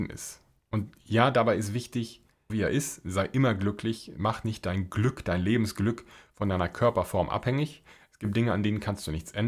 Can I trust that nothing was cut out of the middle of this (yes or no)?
no